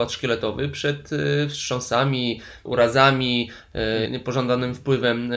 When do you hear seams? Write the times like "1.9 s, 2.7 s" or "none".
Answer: 2.7 s, 4.1 s